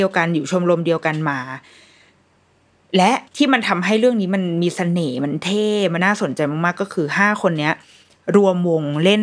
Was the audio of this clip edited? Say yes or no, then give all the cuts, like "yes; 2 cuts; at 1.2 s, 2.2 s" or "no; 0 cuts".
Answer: yes; 2 cuts; at 3.3 s, 6.0 s